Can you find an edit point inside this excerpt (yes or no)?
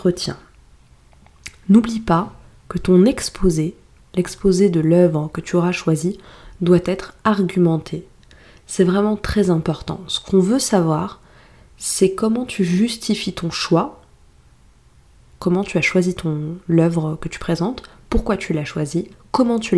no